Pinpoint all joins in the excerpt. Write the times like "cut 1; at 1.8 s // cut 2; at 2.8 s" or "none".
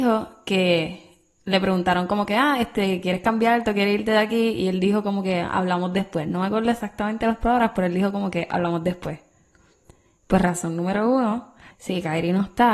cut 1; at 11.7 s